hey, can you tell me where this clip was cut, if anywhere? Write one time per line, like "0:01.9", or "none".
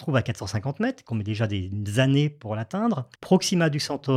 0:03.1

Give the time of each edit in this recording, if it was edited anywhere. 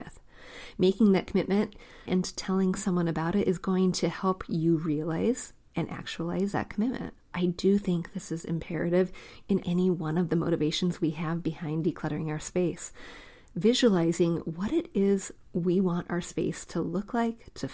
0:02.1
0:07.3
0:09.6

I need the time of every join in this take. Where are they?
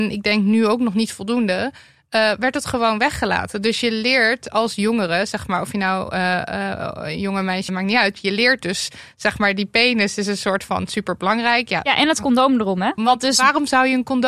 0:07.7
0:13.0

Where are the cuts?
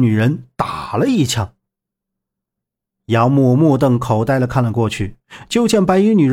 none

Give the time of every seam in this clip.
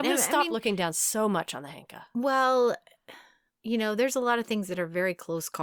0:03.5

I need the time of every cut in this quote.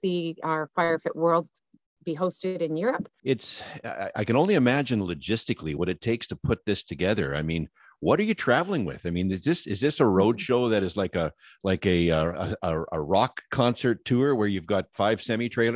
0:03.2

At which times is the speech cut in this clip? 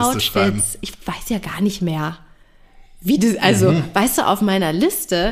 none

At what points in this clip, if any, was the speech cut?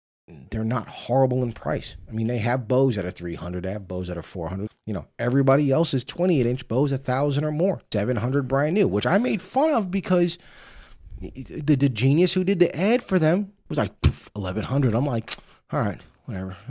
0:04.7
0:07.9

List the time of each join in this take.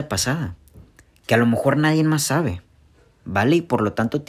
none

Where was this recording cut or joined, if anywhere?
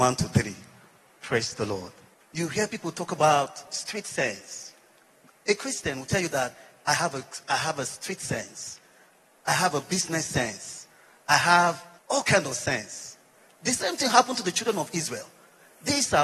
0:02.2

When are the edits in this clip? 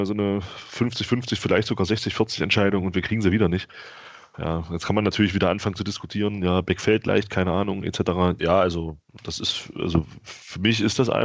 0:04.3
0:08.4

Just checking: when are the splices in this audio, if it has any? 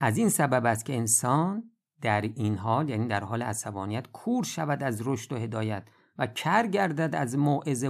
none

